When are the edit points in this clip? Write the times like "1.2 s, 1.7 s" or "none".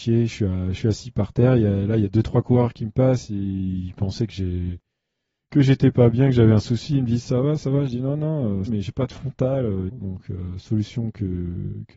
8.7 s, 9.9 s